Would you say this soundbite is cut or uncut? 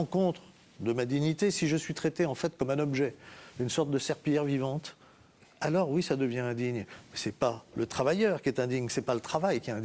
uncut